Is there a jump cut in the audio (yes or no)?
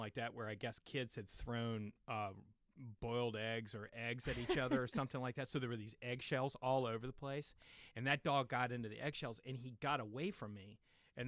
no